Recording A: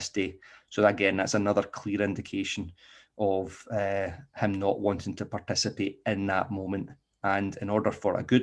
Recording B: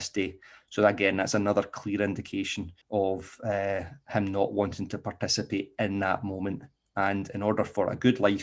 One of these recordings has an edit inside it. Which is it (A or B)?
B